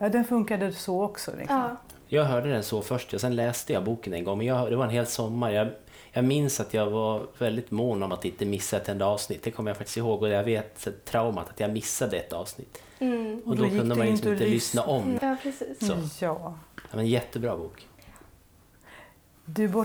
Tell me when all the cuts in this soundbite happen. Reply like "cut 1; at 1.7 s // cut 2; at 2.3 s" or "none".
cut 1; at 15.2 s